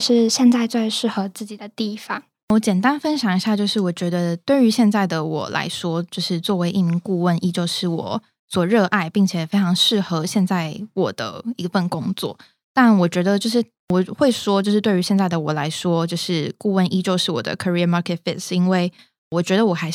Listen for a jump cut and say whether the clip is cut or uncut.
uncut